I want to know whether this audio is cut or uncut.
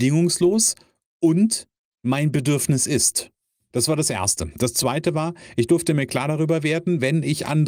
cut